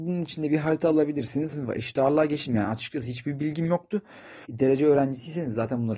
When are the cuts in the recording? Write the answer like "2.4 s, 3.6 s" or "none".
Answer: 1.5 s, 4.5 s